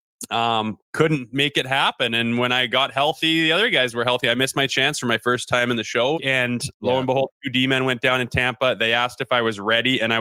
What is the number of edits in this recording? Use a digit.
1